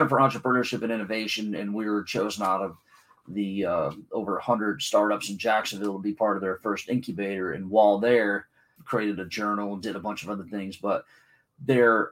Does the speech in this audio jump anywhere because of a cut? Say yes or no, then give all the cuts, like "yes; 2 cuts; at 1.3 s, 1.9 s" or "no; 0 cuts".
yes; 1 cut; at 8.8 s